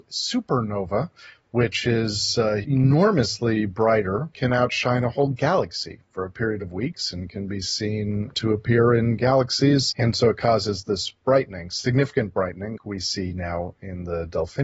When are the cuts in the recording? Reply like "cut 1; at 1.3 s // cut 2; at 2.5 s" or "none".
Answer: cut 1; at 9.9 s // cut 2; at 12.8 s